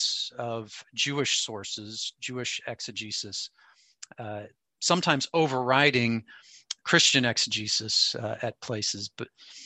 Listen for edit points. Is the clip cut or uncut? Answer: cut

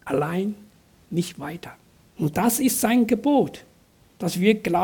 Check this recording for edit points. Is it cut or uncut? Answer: cut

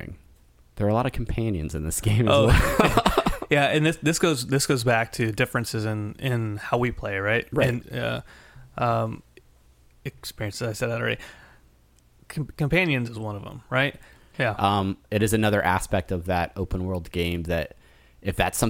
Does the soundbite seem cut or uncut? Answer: cut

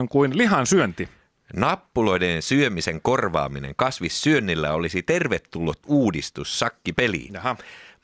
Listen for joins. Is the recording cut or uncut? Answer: uncut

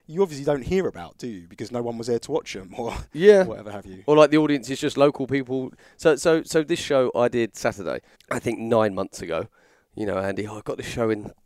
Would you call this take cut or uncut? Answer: cut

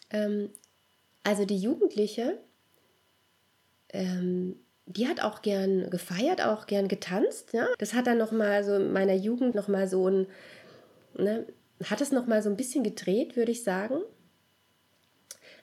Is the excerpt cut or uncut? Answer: cut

